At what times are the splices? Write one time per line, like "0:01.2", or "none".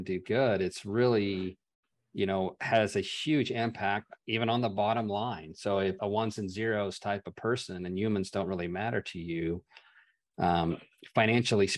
0:06.0